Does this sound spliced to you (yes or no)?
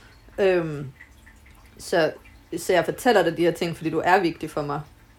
no